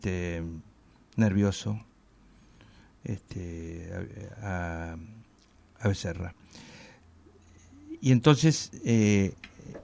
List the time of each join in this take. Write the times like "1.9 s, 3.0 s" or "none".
none